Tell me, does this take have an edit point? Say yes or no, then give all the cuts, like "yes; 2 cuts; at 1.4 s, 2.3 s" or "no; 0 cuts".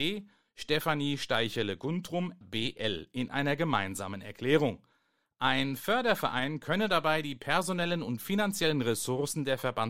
yes; 1 cut; at 2.4 s